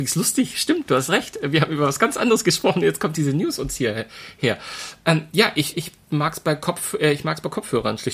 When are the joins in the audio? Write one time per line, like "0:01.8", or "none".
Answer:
0:05.7